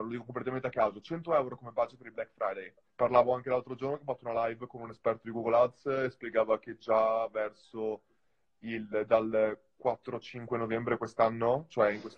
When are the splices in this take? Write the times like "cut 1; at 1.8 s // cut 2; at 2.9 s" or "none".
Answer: cut 1; at 2.9 s